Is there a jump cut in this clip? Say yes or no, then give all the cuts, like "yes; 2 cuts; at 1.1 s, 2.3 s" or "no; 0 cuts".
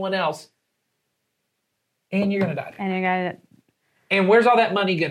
no; 0 cuts